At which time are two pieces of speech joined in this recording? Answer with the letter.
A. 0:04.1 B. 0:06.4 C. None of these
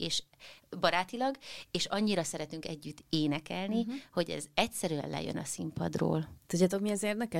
C